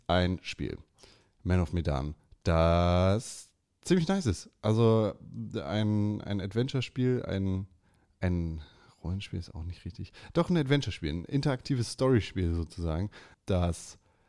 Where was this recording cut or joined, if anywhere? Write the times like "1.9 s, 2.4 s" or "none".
13.3 s